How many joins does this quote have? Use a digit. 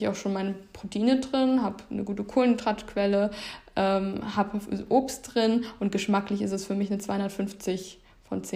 0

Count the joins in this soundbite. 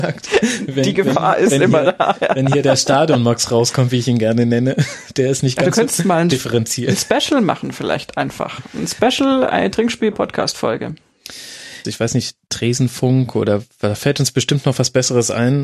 2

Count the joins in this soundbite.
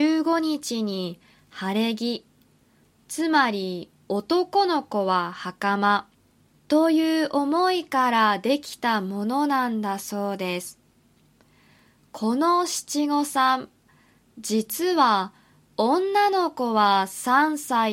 1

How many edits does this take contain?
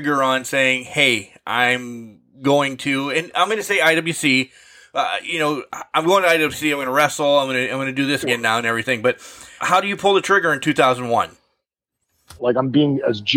3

